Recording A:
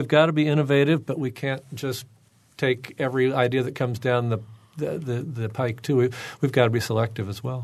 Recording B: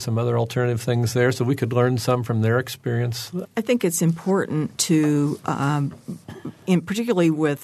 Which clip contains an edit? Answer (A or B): B